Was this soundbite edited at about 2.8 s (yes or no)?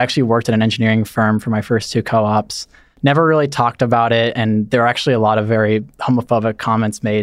no